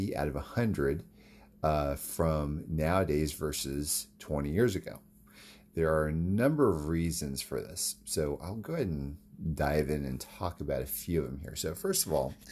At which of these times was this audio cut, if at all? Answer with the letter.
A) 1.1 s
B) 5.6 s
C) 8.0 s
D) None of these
D